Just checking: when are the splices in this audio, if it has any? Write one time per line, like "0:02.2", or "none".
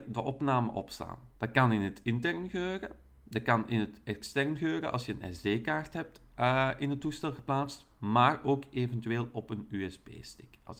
none